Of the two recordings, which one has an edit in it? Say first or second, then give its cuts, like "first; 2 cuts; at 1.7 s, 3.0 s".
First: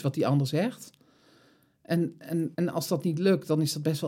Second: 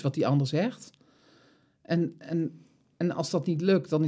first; 1 cut; at 2.5 s